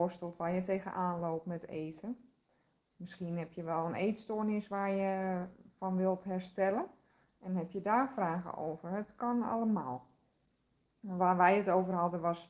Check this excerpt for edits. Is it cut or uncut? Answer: uncut